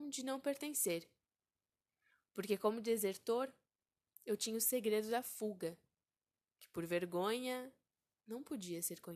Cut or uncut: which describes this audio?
uncut